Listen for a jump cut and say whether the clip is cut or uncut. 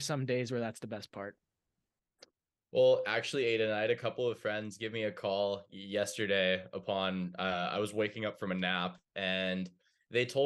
uncut